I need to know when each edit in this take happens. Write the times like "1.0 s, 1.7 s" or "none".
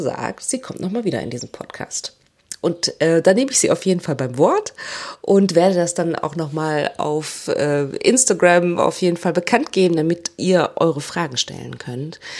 none